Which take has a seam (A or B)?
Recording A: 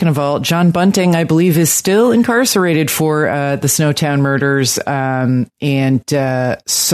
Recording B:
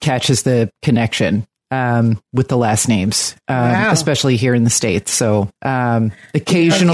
B